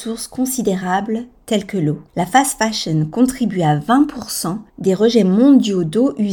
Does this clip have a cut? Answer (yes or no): yes